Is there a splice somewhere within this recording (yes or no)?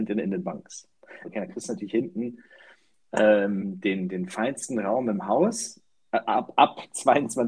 yes